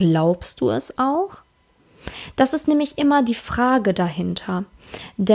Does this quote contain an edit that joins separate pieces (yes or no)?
no